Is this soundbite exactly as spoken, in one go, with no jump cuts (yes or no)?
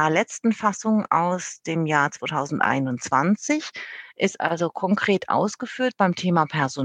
yes